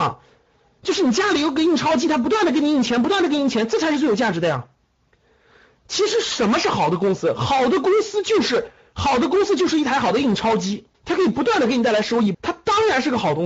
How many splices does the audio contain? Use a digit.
2